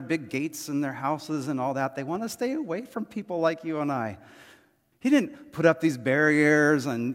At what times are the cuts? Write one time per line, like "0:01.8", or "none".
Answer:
0:04.9